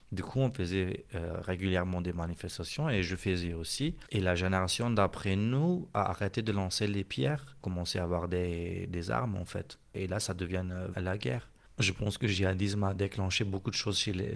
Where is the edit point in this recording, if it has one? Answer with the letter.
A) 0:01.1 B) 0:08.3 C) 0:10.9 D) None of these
C